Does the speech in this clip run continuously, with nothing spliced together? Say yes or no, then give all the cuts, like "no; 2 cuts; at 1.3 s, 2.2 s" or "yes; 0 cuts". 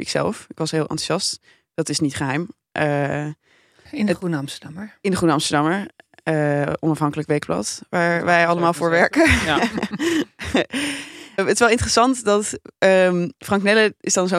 no; 1 cut; at 11.4 s